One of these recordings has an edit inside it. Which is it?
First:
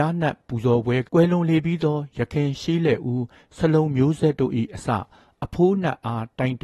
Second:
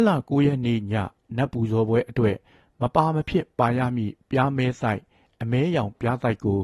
first; 1 cut; at 1.0 s

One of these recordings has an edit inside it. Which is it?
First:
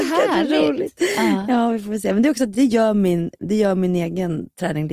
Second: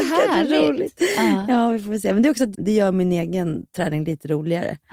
second; 1 cut; at 2.5 s

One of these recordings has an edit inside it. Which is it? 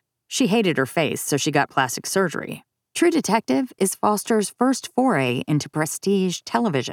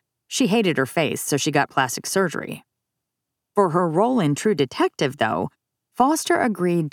first; 1 cut; at 2.9 s

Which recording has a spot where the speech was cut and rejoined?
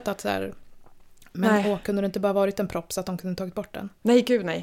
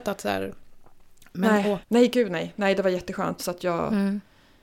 second; 2 cuts; at 1.8 s, 3.4 s

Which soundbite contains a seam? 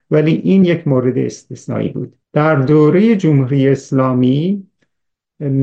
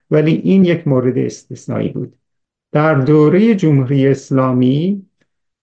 first; 1 cut; at 2.2 s

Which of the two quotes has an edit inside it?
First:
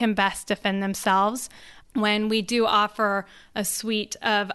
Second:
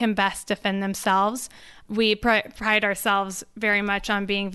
first; 1 cut; at 1.8 s

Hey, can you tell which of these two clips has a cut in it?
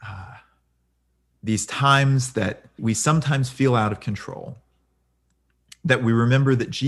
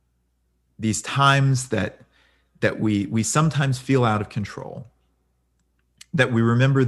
first; 1 cut; at 2.8 s

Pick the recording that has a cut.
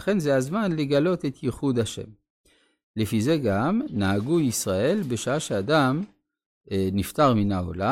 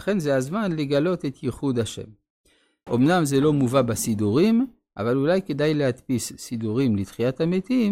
second; 1 cut; at 2.9 s

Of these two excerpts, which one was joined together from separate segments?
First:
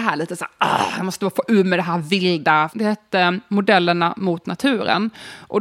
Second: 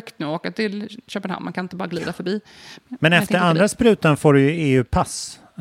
first; 1 cut; at 2.7 s

